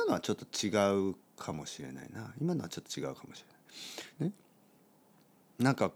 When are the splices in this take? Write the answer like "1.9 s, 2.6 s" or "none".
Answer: 4.2 s